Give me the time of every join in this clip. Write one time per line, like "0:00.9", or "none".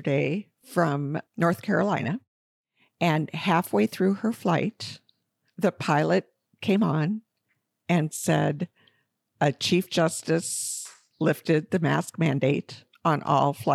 0:01.3
0:11.1